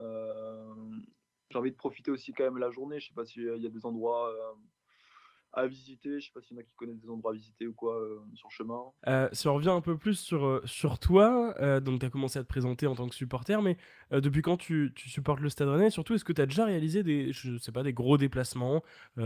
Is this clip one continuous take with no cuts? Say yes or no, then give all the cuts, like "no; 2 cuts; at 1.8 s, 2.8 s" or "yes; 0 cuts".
no; 1 cut; at 9.0 s